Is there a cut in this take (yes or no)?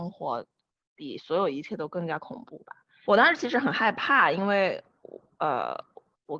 yes